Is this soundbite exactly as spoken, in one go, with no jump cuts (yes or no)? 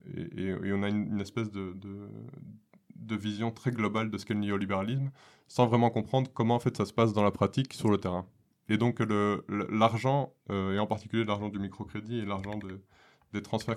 yes